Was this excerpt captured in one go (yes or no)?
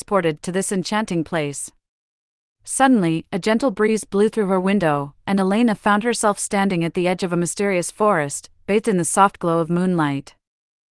yes